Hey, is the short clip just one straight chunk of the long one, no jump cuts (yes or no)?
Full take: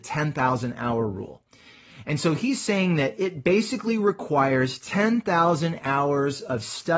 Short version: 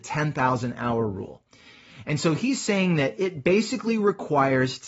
yes